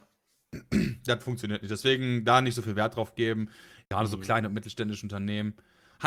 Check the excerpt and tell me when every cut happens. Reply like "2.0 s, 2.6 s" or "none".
3.8 s